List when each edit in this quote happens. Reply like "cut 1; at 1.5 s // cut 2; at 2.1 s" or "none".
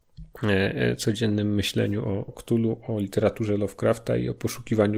cut 1; at 2.3 s